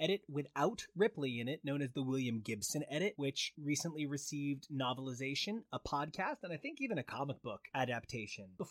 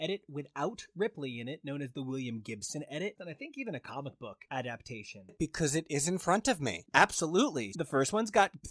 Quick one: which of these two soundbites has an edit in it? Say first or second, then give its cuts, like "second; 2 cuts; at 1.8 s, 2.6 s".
second; 3 cuts; at 3.1 s, 5.3 s, 7.7 s